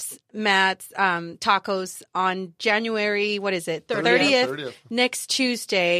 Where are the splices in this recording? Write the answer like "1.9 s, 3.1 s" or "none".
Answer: none

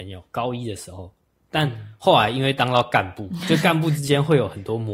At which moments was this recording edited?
none

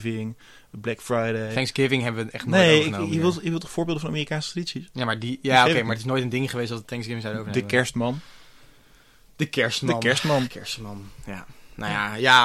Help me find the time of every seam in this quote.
none

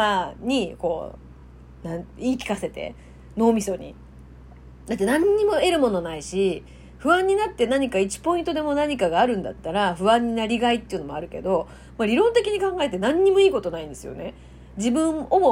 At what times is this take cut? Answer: none

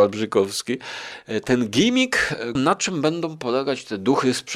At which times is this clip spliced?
2.6 s

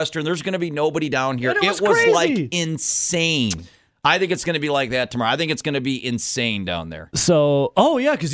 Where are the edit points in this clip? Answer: none

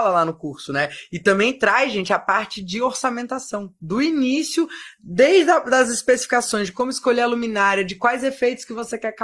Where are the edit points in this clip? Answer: none

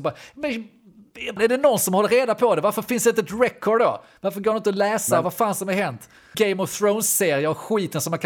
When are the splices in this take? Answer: 1.4 s, 6.3 s

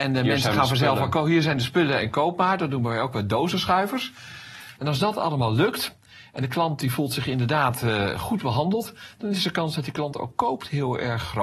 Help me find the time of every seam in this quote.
4.8 s

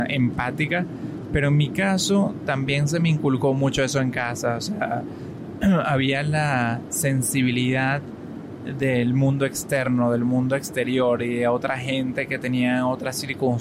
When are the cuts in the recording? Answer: none

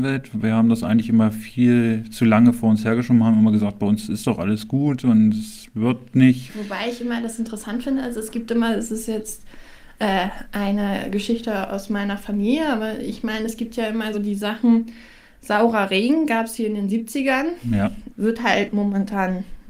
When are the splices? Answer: 6.5 s, 14.1 s, 18.1 s

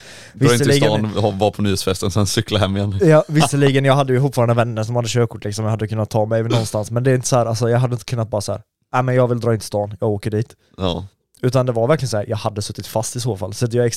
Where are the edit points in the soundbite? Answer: none

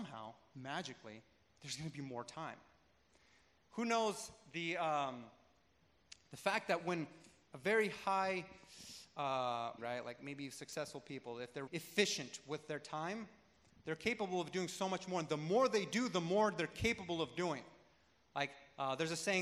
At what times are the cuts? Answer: 9.8 s, 11.7 s

